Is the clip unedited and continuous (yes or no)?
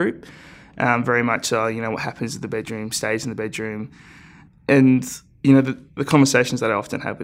no